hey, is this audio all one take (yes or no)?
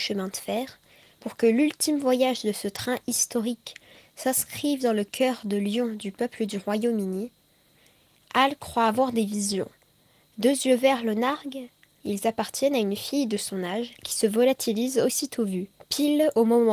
no